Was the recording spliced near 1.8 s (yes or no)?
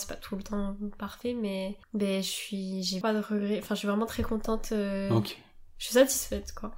yes